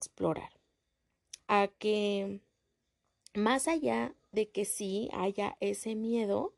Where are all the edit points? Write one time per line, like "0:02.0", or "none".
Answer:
0:01.4